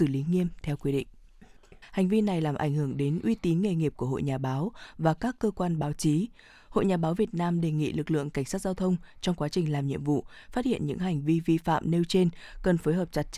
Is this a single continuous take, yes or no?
no